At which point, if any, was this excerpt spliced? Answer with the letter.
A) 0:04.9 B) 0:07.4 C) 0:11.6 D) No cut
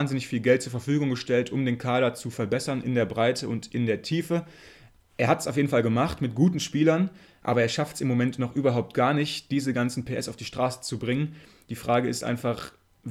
D